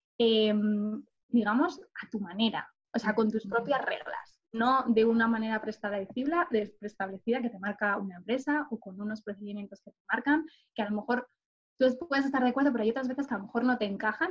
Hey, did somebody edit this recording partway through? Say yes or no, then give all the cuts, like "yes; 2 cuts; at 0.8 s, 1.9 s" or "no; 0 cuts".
yes; 1 cut; at 1.1 s